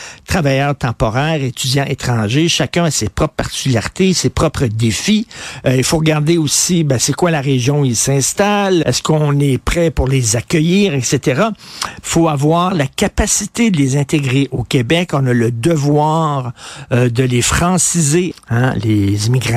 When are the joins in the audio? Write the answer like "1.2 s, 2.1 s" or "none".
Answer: 8.8 s, 12.0 s, 18.3 s